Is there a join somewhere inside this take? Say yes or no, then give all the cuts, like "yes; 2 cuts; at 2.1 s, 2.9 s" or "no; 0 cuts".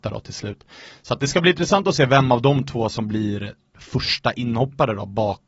no; 0 cuts